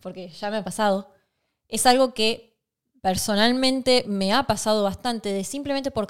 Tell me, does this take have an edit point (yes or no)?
yes